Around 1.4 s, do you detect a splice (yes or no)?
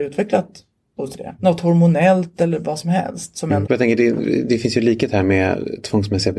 yes